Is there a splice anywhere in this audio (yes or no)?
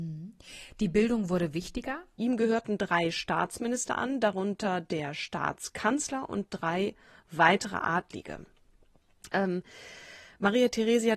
yes